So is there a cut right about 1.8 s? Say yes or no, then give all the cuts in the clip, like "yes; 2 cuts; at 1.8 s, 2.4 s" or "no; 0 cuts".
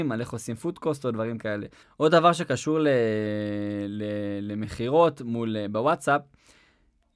yes; 1 cut; at 1.8 s